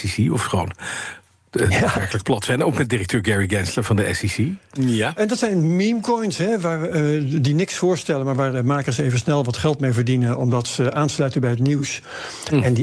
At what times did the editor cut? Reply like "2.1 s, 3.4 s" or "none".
4.8 s